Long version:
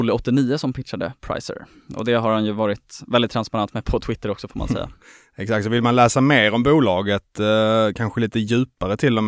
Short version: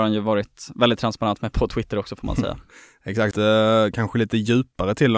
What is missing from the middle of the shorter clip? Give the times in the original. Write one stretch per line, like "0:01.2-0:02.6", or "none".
0:05.6-0:07.3